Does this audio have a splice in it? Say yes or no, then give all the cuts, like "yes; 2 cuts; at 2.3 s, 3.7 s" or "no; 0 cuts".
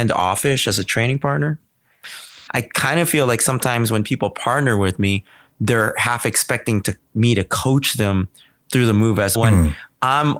yes; 2 cuts; at 2.5 s, 9.3 s